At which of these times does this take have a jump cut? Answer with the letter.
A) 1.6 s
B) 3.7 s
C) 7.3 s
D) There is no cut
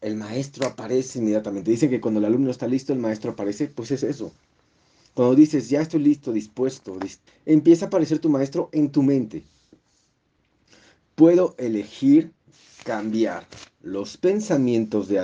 C